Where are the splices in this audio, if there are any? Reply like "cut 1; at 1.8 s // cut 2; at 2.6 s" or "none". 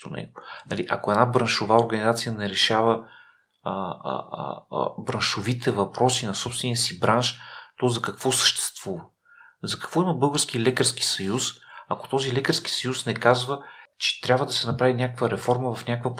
none